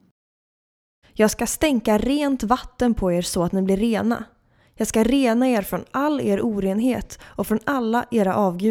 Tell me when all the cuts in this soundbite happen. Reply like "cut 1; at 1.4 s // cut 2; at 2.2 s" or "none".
cut 1; at 1.0 s